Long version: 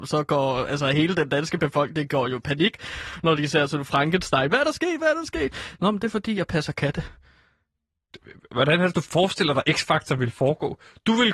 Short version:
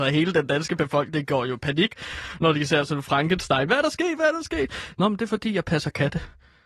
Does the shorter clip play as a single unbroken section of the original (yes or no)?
yes